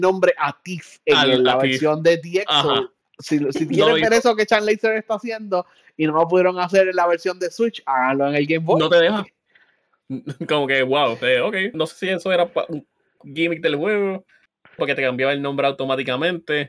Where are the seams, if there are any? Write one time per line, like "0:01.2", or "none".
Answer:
0:11.7
0:14.8